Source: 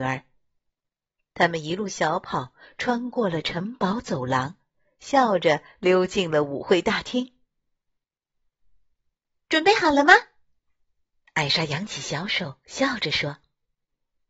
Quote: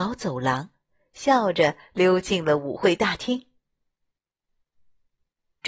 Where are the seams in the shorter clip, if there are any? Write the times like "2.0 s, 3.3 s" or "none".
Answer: none